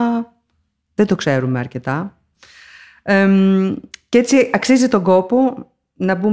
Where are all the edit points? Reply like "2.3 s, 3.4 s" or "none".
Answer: none